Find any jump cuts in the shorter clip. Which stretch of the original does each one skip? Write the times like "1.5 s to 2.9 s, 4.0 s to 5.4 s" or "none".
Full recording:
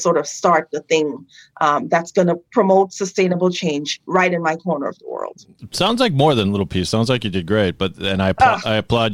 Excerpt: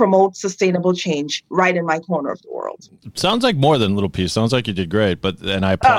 none